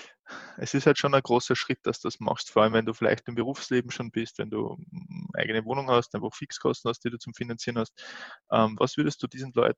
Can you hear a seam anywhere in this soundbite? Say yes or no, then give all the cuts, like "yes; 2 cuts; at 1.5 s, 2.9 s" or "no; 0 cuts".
no; 0 cuts